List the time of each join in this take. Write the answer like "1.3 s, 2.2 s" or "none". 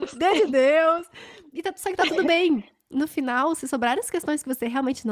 none

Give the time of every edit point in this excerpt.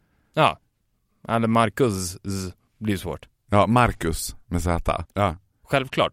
5.1 s

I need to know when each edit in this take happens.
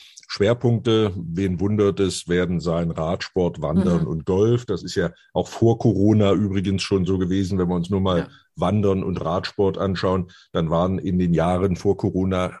none

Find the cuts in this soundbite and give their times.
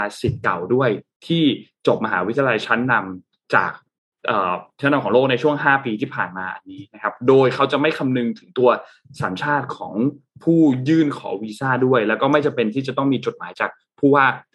none

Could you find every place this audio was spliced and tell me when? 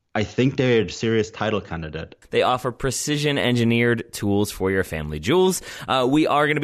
2.2 s

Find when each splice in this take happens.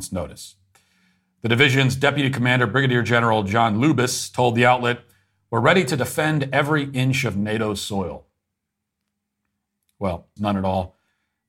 10.4 s

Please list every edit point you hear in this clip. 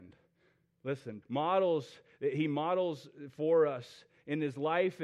1.2 s

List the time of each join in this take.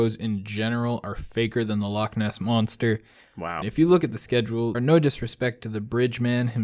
3.6 s, 4.7 s

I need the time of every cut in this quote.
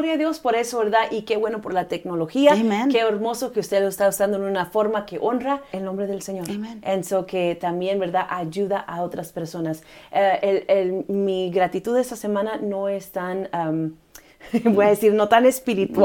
5.7 s

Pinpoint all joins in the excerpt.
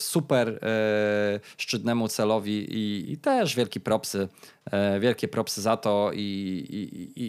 3.0 s

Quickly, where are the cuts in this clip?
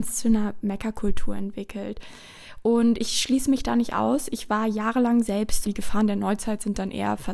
5.7 s

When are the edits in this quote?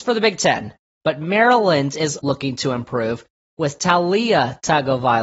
1.0 s, 2.2 s

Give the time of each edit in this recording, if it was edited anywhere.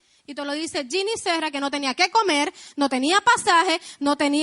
none

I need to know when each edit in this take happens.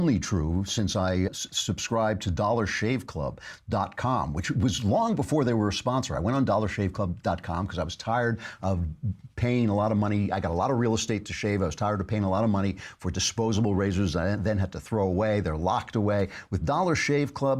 1.3 s

